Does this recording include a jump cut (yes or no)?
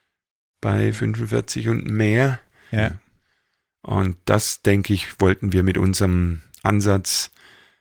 yes